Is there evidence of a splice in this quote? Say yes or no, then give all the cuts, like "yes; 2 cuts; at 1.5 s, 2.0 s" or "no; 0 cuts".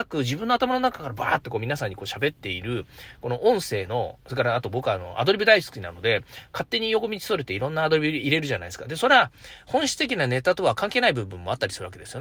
no; 0 cuts